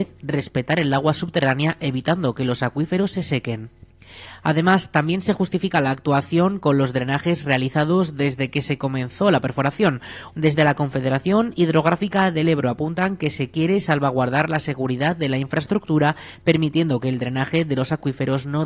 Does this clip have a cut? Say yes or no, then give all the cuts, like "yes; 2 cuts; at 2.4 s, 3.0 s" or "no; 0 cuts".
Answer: yes; 1 cut; at 10.3 s